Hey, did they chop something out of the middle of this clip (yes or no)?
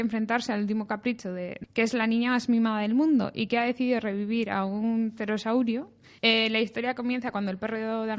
yes